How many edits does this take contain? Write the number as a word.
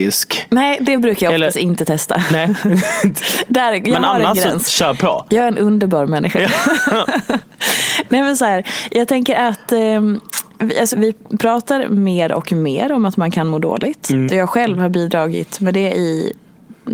two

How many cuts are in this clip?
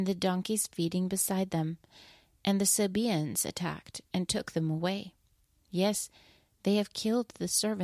zero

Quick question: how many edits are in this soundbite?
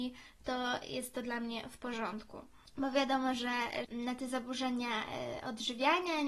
two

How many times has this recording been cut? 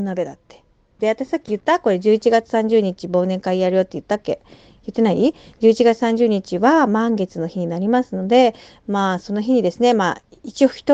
one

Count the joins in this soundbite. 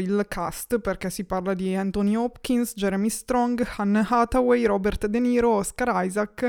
zero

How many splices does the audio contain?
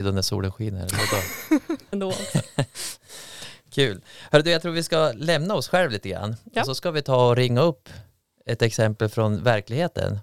one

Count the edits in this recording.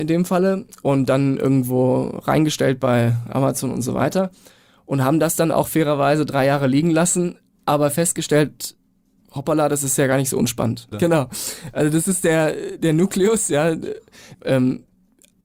two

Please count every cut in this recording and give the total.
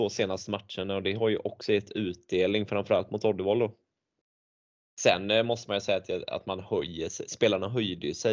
one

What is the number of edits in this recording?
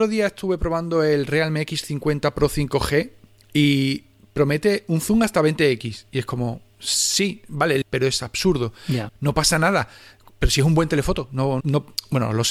three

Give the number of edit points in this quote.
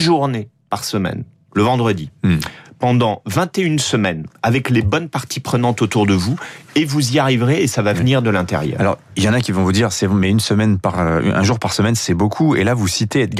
zero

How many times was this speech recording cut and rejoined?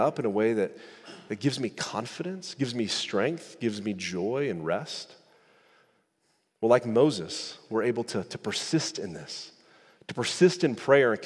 zero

